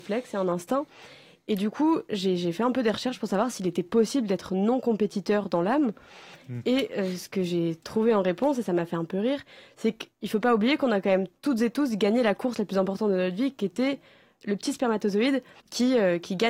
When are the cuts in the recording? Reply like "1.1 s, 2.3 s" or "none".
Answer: none